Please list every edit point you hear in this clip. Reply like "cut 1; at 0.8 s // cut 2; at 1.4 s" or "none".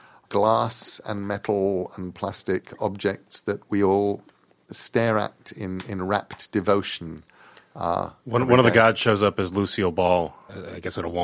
none